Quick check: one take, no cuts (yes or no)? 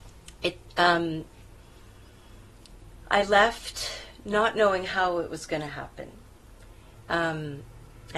yes